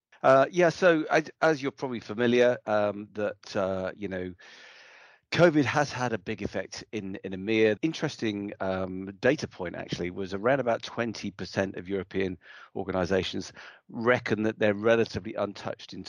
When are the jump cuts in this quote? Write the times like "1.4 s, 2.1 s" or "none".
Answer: 7.8 s